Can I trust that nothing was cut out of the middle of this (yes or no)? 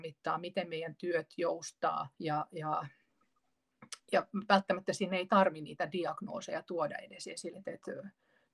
no